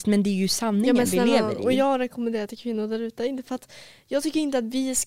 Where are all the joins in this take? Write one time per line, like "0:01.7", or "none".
none